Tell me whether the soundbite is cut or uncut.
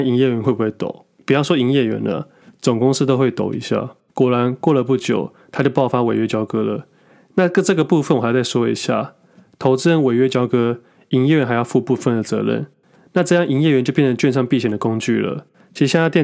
cut